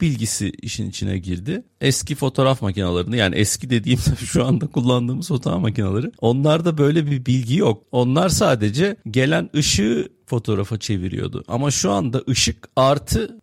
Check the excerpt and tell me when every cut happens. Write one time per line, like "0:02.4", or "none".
0:01.7